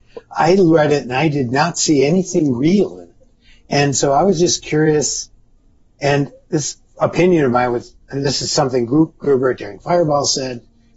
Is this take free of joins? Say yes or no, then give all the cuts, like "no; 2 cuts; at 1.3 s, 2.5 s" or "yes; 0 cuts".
yes; 0 cuts